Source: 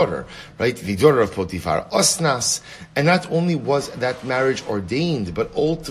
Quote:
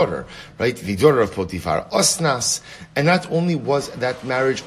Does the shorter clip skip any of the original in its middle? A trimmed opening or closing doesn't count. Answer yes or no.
no